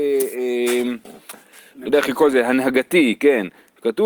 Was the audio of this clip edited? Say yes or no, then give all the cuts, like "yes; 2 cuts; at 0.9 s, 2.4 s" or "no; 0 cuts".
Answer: no; 0 cuts